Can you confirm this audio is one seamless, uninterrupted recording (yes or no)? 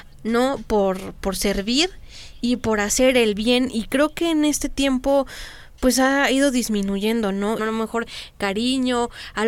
no